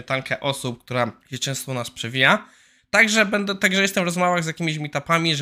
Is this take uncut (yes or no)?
no